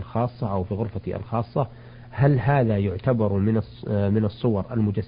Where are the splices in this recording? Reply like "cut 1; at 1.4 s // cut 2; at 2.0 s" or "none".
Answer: none